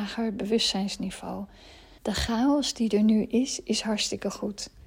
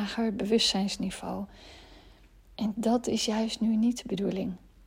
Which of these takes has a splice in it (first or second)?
first